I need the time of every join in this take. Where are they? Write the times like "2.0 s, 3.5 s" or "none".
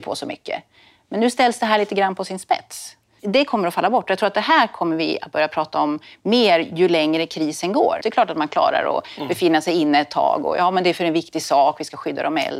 3.2 s, 8.0 s